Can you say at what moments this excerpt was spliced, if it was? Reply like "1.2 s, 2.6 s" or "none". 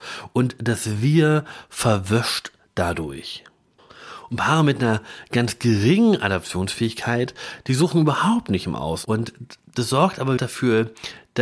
9.0 s, 10.4 s